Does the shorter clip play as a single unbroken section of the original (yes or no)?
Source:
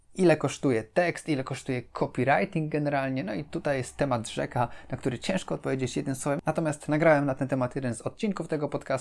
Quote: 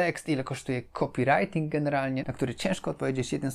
no